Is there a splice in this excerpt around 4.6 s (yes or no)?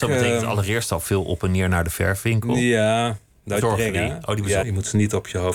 yes